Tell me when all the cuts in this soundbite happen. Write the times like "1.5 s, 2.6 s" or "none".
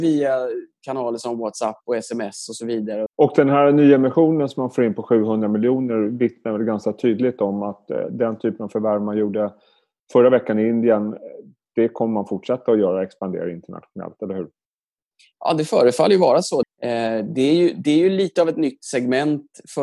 3.1 s, 16.6 s